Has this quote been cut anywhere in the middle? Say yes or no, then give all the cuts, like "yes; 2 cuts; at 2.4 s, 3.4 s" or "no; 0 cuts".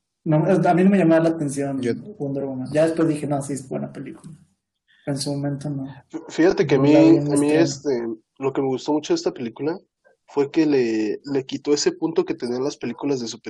no; 0 cuts